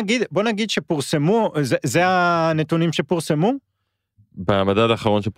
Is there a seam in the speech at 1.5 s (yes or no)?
no